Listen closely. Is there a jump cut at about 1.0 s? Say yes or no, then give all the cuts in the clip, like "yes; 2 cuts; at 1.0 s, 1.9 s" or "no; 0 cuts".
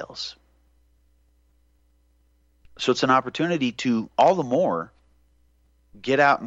no; 0 cuts